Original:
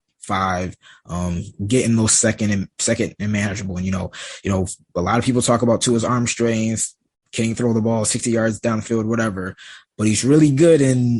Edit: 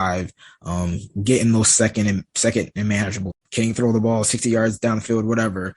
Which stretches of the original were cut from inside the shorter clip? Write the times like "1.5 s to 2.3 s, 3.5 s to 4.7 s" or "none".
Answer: 3.7 s to 7.1 s